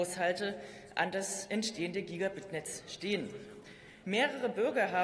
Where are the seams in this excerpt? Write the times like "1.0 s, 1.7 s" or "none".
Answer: 4.0 s